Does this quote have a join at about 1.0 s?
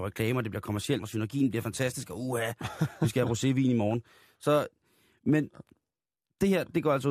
yes; 1 cut; at 1.0 s

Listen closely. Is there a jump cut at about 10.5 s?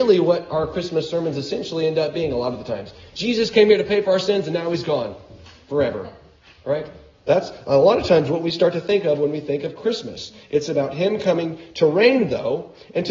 no; 0 cuts

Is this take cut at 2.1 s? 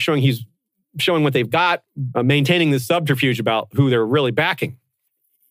yes; 1 cut; at 2.1 s

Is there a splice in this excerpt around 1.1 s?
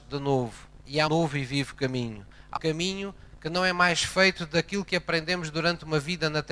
yes; 2 cuts; at 1.1 s, 2.6 s

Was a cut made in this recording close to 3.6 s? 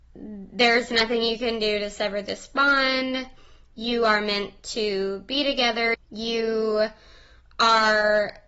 no; 1 cut; at 5.9 s

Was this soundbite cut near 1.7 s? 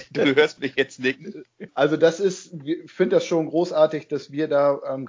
yes; 1 cut; at 1.7 s

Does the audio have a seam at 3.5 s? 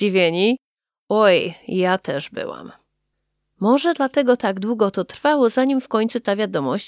no; 0 cuts

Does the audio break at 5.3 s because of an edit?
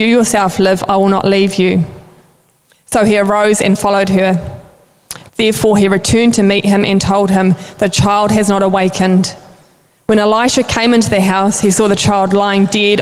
yes; 1 cut; at 5.3 s

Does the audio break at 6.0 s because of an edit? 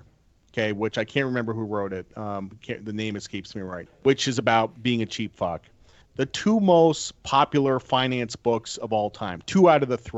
yes; 2 cuts; at 3.9 s, 6.0 s

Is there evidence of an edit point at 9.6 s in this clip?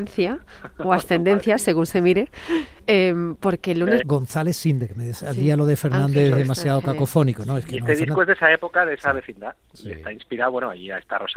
no; 1 cut; at 4.0 s

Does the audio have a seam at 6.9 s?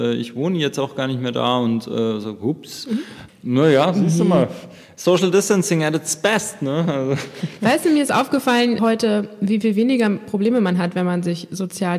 no; 2 cuts; at 3.3 s, 8.8 s

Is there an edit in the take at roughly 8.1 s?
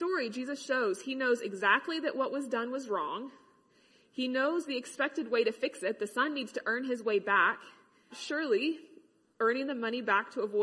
yes; 1 cut; at 8.1 s

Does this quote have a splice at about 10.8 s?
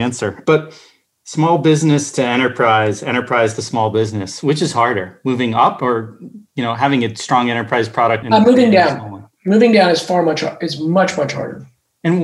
no; 1 cut; at 8.2 s

